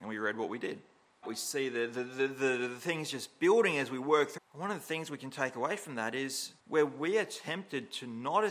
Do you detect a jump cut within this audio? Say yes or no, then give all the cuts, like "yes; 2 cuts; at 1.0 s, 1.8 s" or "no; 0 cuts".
yes; 3 cuts; at 1.2 s, 4.4 s, 6.6 s